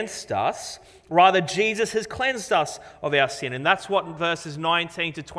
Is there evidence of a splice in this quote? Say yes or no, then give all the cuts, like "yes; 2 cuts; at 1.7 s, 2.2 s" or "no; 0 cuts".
no; 0 cuts